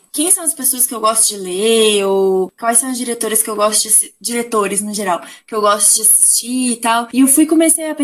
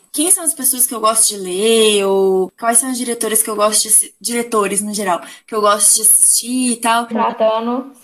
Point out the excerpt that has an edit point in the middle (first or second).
second